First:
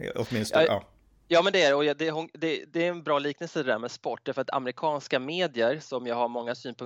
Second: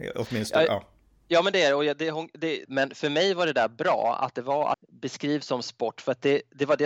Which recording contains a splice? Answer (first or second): second